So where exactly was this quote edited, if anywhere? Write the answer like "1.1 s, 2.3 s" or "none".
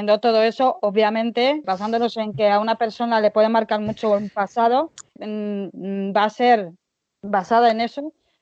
1.6 s, 5.2 s